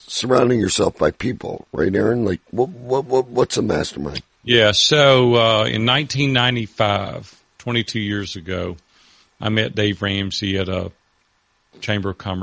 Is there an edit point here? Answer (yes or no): no